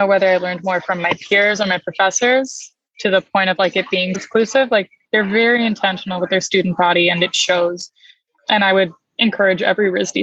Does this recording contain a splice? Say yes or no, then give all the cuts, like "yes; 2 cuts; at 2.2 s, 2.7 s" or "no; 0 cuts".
yes; 1 cut; at 4.1 s